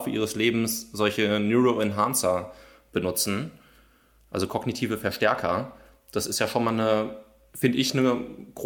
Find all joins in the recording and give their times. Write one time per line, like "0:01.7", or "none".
none

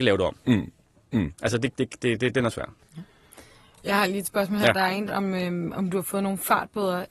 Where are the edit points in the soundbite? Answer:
0:02.8
0:05.1

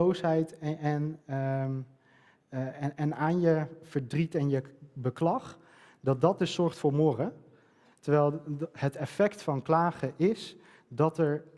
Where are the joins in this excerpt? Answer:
0:07.9

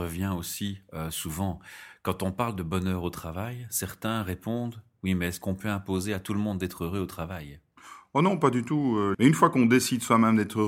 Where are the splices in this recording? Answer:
0:09.1

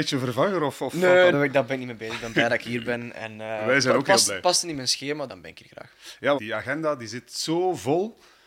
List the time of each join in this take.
0:01.3
0:05.3
0:06.4

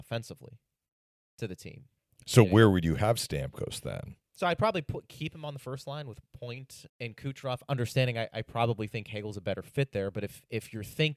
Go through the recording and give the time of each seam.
0:06.9

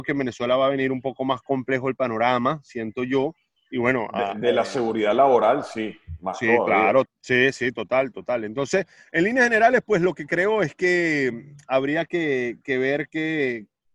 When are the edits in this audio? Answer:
0:07.1

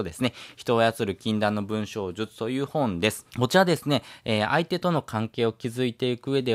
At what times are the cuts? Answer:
0:03.3

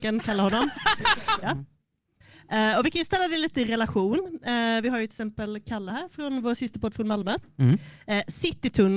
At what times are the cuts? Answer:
0:01.4

